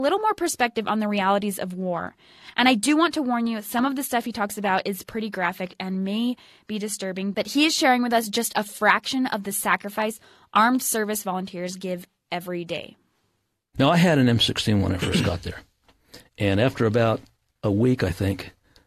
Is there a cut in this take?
no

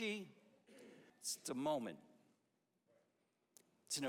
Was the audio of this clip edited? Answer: yes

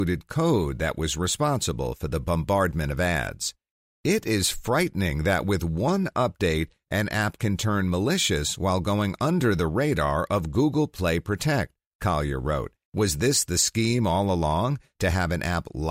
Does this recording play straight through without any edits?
no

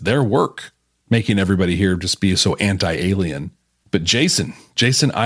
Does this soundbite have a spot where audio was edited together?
no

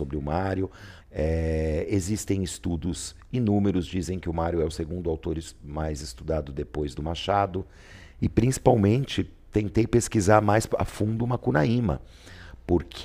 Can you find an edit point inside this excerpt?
yes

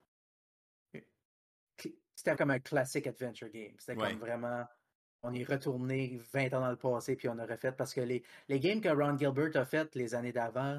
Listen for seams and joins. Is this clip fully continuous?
no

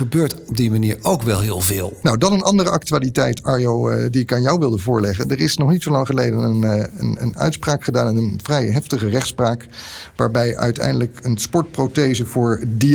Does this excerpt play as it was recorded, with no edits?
no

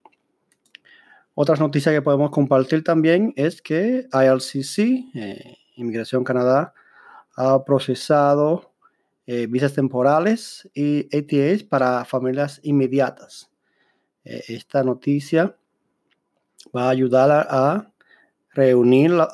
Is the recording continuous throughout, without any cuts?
yes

